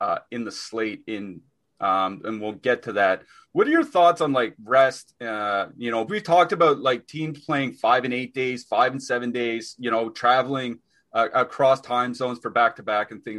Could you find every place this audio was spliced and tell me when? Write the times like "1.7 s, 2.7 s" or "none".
6.1 s